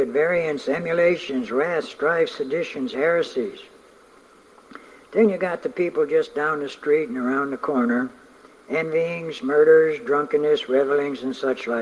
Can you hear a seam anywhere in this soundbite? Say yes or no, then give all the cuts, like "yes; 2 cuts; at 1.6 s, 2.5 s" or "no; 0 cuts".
no; 0 cuts